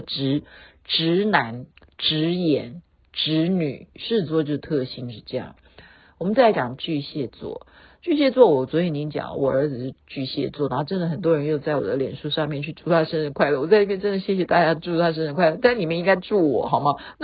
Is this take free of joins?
no; 1 cut; at 3.9 s

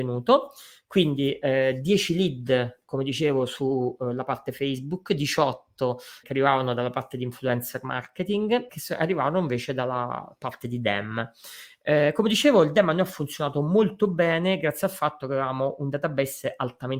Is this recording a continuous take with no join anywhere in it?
no; 2 cuts; at 6.2 s, 8.7 s

